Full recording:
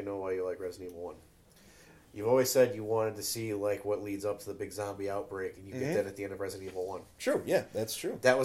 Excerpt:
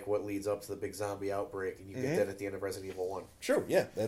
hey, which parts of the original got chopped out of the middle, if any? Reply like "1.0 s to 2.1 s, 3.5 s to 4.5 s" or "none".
none